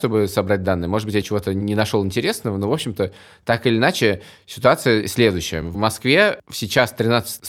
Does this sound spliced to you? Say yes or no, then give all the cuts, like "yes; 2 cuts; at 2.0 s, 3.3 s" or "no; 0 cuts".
no; 0 cuts